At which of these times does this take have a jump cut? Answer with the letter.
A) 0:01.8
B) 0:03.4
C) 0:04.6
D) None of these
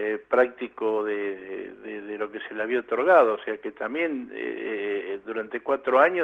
D